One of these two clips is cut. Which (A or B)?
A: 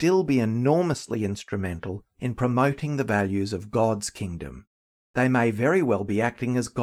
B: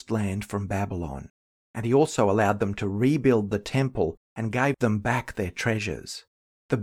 A